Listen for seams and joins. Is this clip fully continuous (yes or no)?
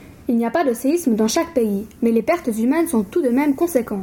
yes